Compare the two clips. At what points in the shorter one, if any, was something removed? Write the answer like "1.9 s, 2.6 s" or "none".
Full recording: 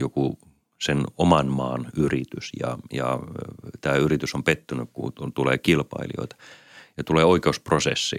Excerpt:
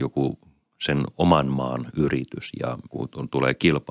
2.9 s

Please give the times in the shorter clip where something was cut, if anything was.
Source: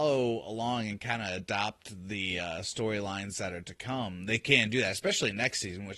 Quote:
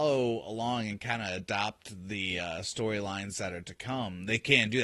none

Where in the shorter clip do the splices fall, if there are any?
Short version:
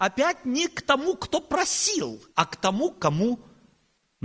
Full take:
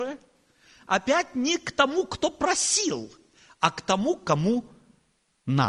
2.3 s

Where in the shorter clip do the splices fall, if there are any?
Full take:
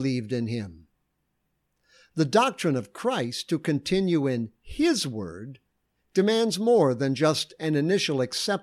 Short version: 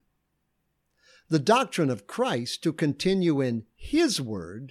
none

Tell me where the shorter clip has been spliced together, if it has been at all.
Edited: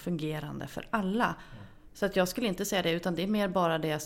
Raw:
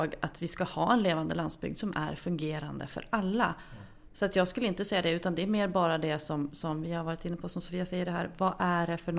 none

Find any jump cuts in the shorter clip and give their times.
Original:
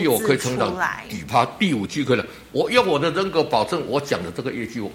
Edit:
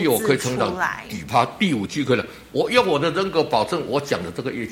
none

